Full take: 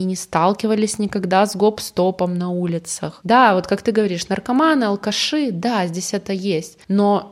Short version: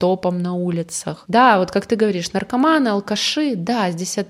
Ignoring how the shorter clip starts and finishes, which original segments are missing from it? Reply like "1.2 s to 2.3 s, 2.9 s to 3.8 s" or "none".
none